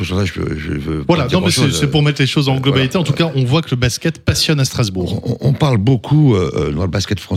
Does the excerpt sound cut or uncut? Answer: uncut